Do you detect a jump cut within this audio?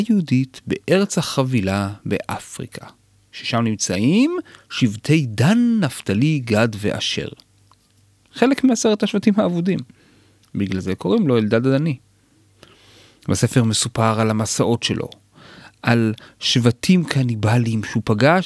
no; 0 cuts

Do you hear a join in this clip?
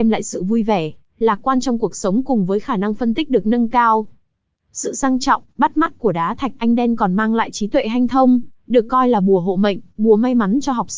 no; 0 cuts

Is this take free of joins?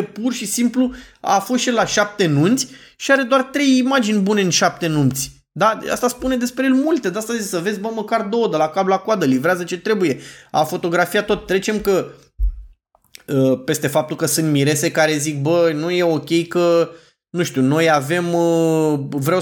yes; 0 cuts

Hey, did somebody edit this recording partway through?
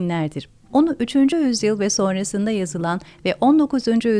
no; 0 cuts

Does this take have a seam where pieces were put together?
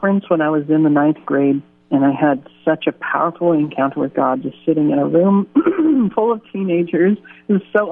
no; 0 cuts

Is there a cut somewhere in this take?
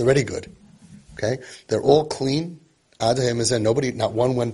no; 0 cuts

